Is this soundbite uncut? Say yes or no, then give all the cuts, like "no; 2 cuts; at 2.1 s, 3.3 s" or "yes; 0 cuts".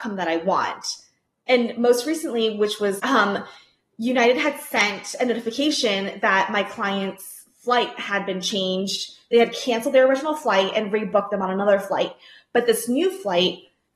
no; 1 cut; at 3.0 s